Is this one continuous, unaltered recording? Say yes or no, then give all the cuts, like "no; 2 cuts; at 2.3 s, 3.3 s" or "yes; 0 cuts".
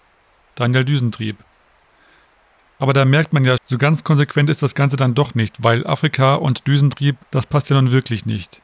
no; 2 cuts; at 3.6 s, 7.2 s